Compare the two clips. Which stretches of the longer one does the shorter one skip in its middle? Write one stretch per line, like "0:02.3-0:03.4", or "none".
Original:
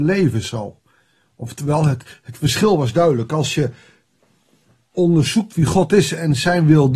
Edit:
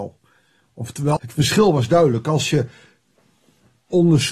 0:01.8-0:02.2